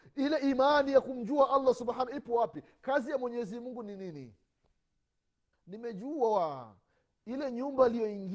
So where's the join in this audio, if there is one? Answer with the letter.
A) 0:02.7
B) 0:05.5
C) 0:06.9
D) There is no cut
B